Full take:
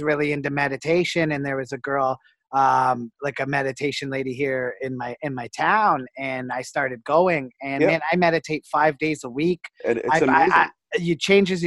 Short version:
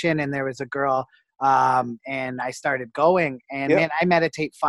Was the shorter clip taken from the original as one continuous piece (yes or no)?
no